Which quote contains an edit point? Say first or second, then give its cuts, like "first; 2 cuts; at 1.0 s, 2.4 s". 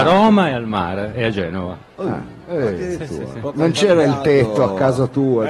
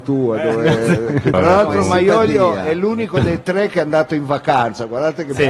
second; 1 cut; at 1.3 s